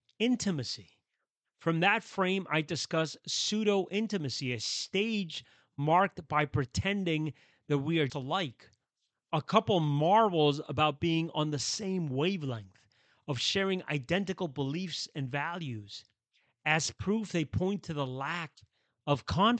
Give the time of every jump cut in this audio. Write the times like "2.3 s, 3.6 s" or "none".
8.1 s